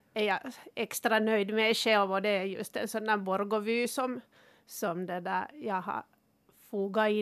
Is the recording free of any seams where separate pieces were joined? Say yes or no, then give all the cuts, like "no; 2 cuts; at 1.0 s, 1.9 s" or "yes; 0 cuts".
yes; 0 cuts